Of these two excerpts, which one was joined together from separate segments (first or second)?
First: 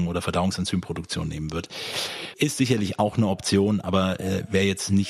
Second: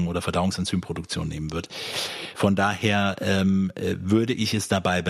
first